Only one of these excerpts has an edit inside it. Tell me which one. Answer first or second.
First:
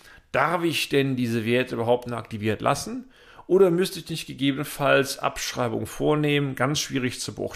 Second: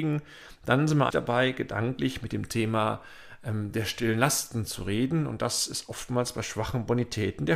second